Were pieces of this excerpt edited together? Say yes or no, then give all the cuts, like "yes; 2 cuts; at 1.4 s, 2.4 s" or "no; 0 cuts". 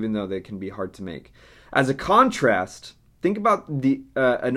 no; 0 cuts